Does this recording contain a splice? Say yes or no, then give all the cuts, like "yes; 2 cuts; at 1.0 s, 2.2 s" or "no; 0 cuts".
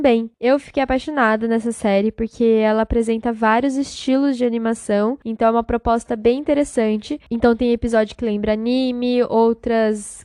no; 0 cuts